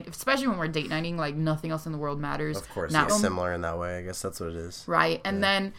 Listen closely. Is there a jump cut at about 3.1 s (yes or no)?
yes